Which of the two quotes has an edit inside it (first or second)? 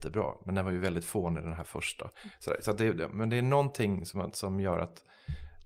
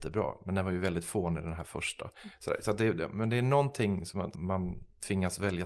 second